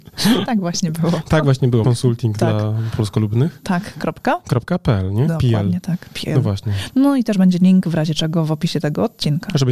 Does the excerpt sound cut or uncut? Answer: cut